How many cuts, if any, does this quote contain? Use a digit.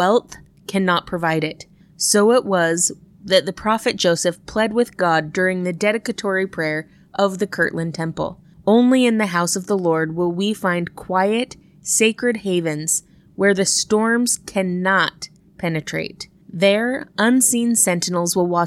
2